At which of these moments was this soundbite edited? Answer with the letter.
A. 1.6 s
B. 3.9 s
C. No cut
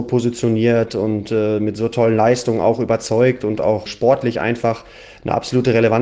B